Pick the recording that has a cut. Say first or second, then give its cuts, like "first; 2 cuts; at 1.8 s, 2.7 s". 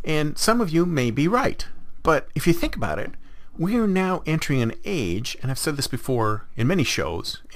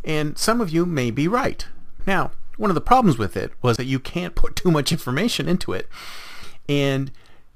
second; 2 cuts; at 2.0 s, 3.8 s